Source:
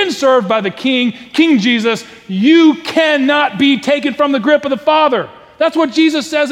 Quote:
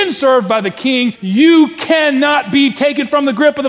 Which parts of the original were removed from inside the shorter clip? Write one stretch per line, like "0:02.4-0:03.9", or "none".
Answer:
0:01.1-0:02.2